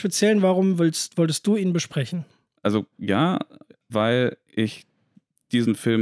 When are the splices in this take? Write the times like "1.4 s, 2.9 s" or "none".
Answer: 3.9 s